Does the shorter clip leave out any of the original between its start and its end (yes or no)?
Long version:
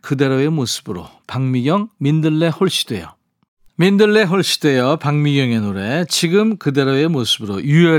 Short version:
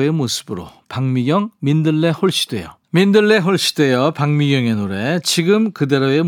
yes